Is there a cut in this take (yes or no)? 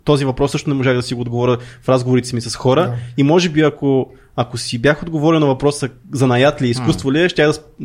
no